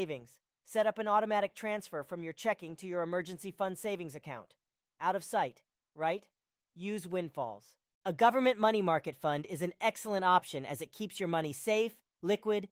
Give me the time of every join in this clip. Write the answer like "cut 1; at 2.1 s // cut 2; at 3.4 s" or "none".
cut 1; at 5.9 s // cut 2; at 7.9 s